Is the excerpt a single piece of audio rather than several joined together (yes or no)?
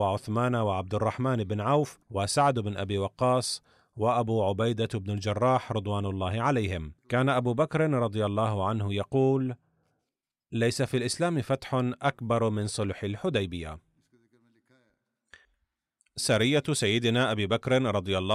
no